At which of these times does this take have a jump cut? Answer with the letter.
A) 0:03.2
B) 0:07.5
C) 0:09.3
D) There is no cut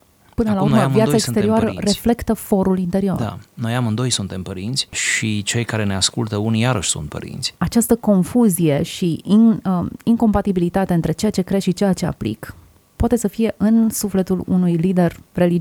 B